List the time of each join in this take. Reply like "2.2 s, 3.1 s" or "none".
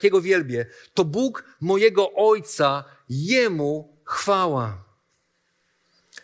none